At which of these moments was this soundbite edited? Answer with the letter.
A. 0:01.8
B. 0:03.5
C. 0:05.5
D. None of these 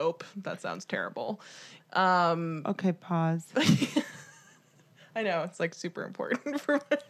A